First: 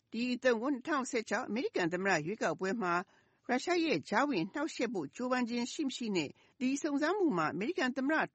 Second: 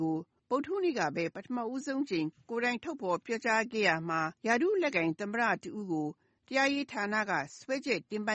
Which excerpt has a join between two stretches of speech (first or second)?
second